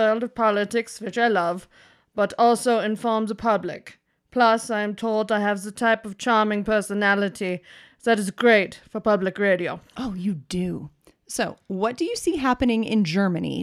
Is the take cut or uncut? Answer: uncut